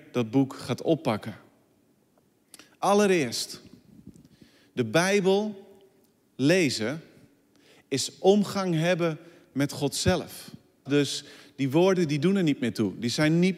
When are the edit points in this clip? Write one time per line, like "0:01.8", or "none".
0:10.9